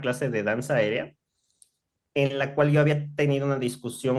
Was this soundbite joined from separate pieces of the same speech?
no; 0 cuts

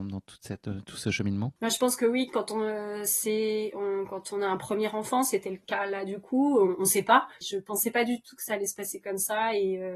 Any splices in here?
yes; 2 cuts; at 1.6 s, 7.4 s

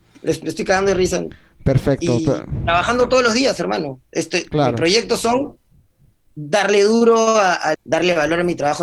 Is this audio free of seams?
no; 1 cut; at 7.7 s

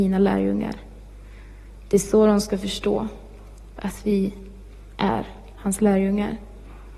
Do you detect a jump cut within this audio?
no; 0 cuts

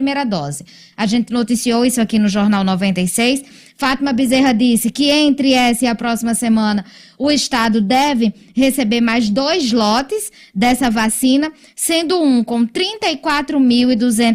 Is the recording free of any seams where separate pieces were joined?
no; 1 cut; at 0.9 s

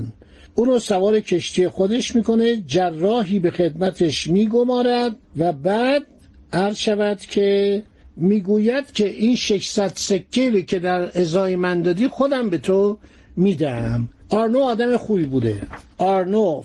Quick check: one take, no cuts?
no; 1 cut; at 5.2 s

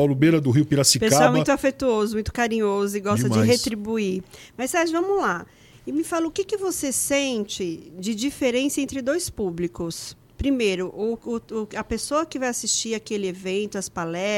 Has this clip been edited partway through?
yes; 1 cut; at 5.7 s

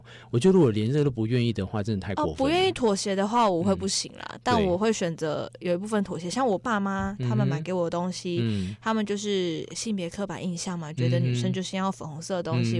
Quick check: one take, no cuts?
yes; 0 cuts

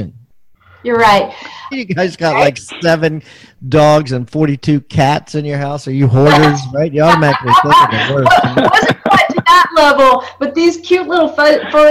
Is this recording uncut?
no; 1 cut; at 1.7 s

